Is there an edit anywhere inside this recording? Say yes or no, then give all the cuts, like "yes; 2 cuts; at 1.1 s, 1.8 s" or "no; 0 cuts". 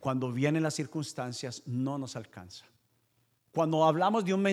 yes; 1 cut; at 3.4 s